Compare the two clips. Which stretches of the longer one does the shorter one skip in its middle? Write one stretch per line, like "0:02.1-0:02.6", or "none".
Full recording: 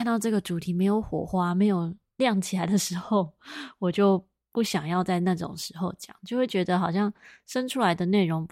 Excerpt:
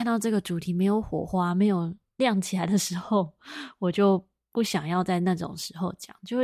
none